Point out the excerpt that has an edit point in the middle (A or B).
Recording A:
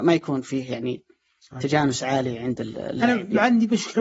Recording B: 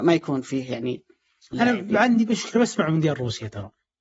B